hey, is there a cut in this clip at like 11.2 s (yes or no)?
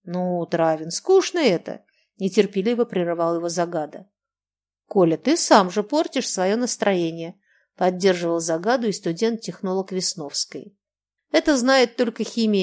yes